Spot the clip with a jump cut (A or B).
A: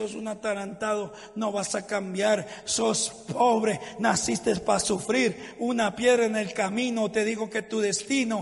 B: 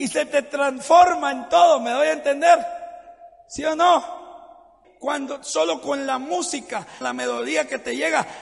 B